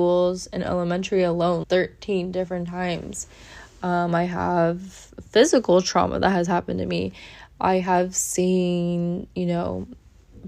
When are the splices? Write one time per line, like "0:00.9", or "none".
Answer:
0:01.6